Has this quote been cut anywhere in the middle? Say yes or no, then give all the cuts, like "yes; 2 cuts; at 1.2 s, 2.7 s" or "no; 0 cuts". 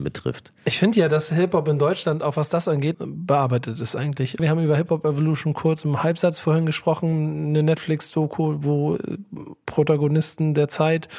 yes; 2 cuts; at 2.9 s, 4.4 s